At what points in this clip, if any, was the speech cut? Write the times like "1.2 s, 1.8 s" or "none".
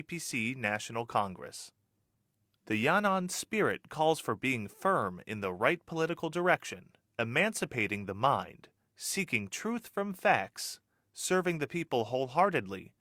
2.5 s